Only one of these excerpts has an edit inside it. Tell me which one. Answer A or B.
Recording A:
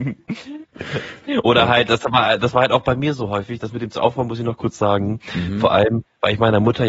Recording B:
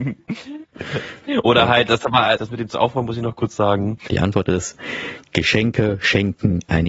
B